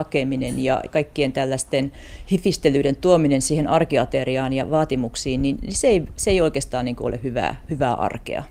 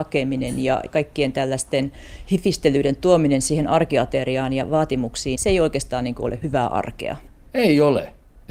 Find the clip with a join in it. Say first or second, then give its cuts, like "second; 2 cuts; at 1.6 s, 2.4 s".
second; 2 cuts; at 5.3 s, 6.4 s